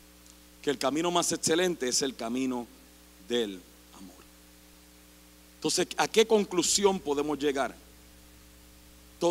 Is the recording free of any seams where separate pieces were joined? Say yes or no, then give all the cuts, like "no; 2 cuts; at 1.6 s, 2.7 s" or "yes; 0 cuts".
yes; 0 cuts